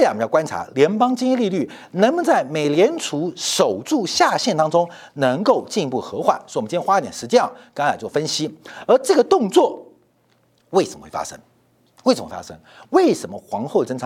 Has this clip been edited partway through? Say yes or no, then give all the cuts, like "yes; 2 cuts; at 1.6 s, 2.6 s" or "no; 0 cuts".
no; 0 cuts